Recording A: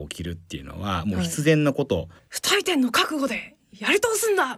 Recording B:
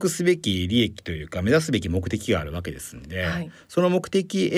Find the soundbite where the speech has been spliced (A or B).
A